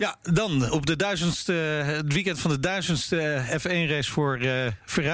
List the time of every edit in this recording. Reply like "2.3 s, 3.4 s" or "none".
none